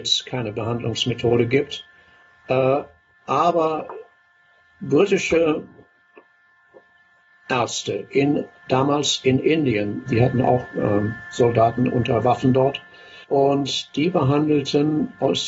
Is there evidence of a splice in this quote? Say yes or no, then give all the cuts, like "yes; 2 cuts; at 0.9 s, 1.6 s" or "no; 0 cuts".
yes; 2 cuts; at 10.1 s, 13.2 s